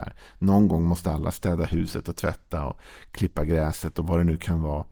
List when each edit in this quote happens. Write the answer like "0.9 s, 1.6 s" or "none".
none